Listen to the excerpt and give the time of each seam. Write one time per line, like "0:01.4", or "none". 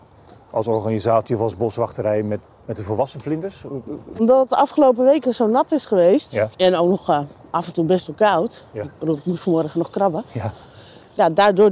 0:02.4
0:04.1